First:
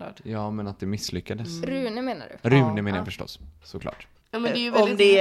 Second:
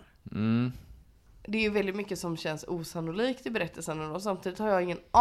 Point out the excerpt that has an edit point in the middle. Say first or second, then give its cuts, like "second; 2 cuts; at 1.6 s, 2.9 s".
first; 1 cut; at 4.2 s